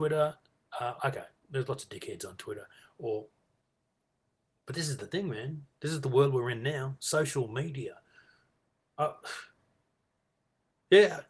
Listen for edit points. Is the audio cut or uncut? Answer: cut